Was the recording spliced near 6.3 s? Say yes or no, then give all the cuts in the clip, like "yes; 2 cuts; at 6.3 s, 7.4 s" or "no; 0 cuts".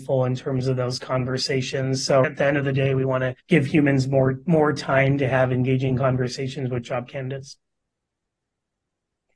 no; 2 cuts; at 2.2 s, 3.4 s